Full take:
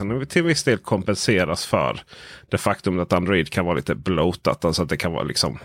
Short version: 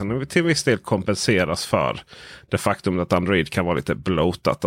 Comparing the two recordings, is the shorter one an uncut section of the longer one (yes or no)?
yes